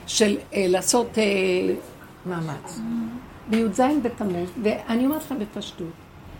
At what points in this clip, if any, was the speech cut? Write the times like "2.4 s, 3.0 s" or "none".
none